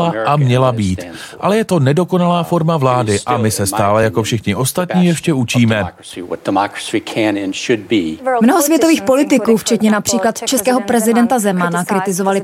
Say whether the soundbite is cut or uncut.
uncut